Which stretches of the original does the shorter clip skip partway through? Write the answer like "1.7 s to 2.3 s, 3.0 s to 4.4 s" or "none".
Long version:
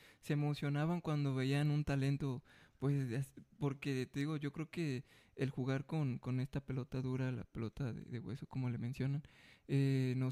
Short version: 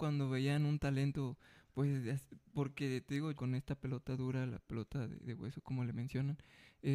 4.4 s to 6.2 s